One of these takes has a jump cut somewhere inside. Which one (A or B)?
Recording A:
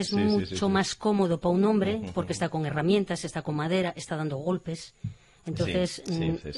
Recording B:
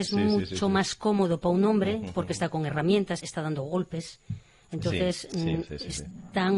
B